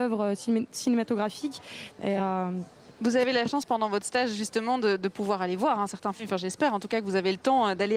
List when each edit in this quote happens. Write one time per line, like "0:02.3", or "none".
0:01.9